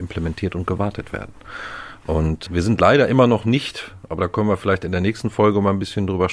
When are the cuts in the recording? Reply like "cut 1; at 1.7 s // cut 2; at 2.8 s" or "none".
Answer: cut 1; at 2.5 s